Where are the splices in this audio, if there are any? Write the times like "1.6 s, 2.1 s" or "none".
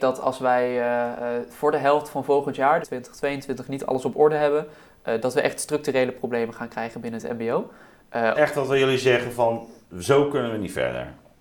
2.8 s, 8.3 s